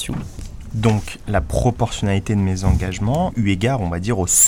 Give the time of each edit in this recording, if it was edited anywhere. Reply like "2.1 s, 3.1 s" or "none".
3.3 s